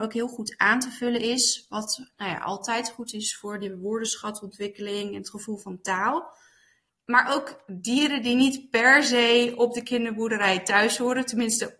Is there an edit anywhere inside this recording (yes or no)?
yes